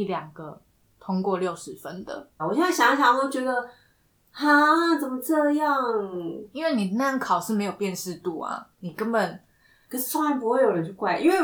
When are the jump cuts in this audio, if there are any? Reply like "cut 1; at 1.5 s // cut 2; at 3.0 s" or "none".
cut 1; at 2.4 s